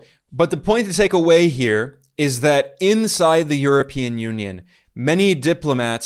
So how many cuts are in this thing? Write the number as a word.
zero